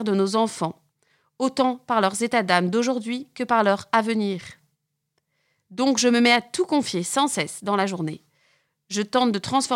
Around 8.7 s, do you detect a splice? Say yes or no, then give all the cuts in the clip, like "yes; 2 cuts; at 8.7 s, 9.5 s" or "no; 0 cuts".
no; 0 cuts